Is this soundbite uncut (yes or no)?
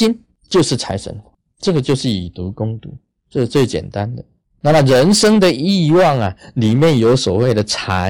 yes